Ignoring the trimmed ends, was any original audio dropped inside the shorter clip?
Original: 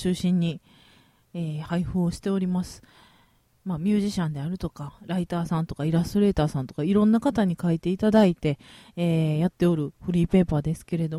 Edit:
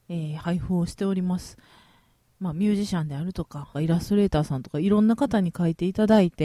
yes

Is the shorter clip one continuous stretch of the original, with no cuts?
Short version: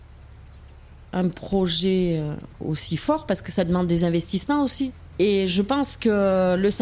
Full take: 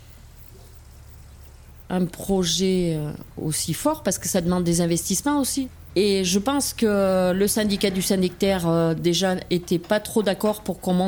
yes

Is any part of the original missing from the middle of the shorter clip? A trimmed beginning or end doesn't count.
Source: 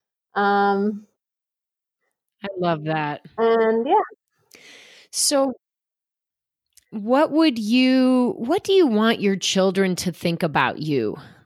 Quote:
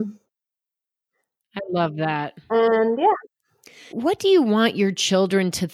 yes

